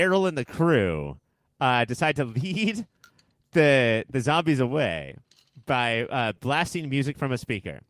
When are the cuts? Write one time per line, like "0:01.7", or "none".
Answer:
none